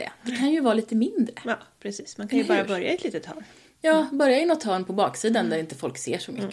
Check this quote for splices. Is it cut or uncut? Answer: uncut